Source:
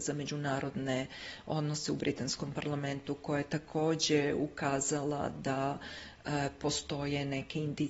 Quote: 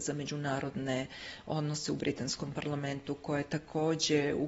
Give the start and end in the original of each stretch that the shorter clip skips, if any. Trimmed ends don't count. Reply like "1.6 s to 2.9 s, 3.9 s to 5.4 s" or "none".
none